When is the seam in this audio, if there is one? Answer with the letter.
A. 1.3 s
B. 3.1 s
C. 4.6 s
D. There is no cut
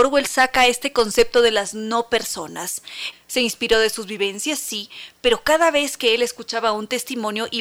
B